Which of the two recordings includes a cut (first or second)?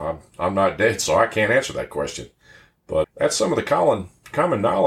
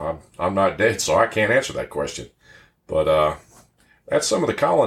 first